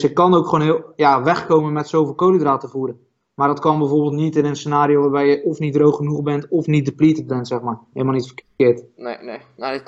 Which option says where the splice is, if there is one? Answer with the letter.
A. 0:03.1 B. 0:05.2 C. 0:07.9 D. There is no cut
C